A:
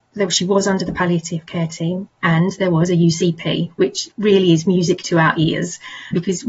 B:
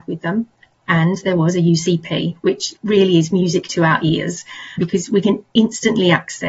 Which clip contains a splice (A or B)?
A